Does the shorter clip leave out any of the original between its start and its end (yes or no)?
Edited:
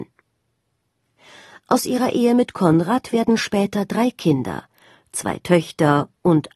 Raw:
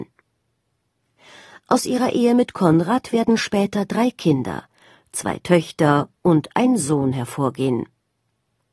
no